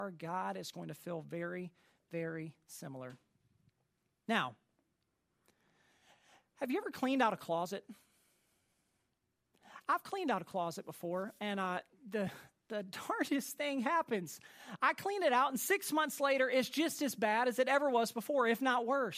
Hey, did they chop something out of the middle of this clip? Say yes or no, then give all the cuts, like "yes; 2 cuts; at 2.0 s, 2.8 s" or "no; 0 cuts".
no; 0 cuts